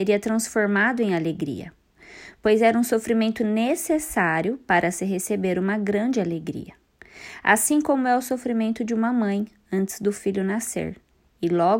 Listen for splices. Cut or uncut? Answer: uncut